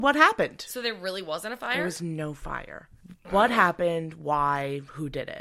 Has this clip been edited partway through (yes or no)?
no